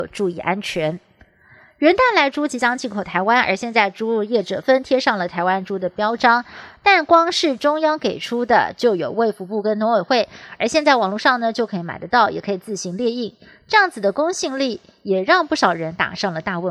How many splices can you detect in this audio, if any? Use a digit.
1